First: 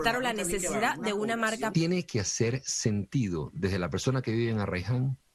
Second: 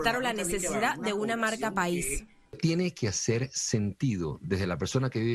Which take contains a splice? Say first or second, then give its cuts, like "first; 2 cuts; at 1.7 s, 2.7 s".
first; 1 cut; at 1.7 s